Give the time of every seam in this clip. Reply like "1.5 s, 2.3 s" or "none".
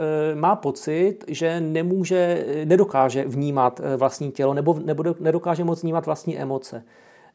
none